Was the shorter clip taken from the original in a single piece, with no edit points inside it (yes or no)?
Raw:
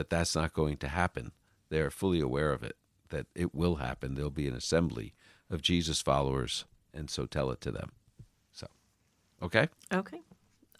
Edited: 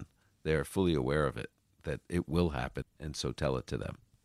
no